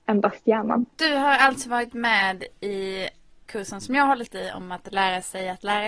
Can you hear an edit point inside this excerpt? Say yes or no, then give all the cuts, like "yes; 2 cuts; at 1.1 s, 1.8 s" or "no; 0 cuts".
yes; 1 cut; at 0.9 s